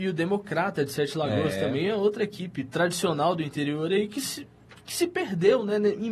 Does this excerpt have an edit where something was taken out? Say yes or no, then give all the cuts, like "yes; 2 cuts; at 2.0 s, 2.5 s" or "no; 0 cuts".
no; 0 cuts